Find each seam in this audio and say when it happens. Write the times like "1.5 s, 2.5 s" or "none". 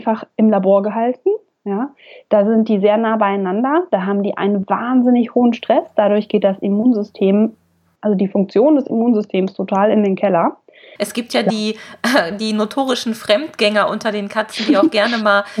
11.0 s